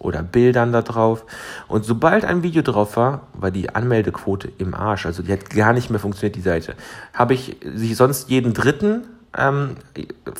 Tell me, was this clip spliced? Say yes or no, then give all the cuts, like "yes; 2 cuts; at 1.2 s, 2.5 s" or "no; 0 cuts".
no; 0 cuts